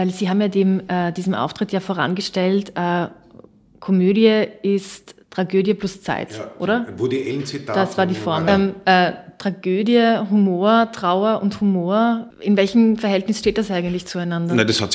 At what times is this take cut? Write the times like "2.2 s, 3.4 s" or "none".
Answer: 8.5 s, 12.3 s